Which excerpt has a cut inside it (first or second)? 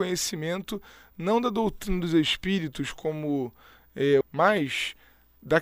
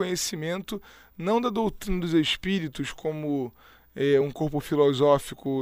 first